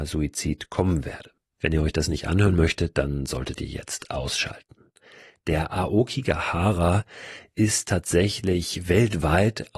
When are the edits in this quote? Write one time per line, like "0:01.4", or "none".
none